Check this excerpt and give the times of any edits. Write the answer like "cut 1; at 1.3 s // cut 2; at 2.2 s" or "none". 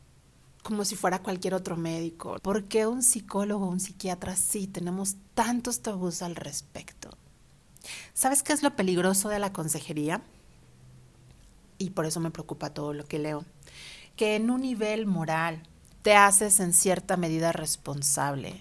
cut 1; at 2.4 s // cut 2; at 15.9 s